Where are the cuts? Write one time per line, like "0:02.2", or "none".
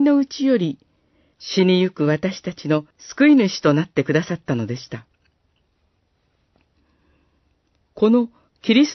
0:01.3
0:02.9